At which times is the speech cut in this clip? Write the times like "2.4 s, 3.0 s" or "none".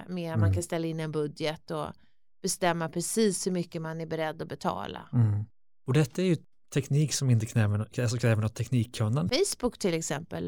9.3 s